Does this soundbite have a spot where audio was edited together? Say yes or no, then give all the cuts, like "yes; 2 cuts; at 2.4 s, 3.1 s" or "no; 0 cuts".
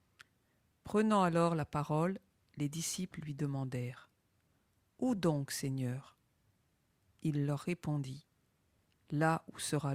no; 0 cuts